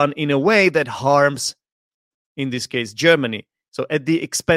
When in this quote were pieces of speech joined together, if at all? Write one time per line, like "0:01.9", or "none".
none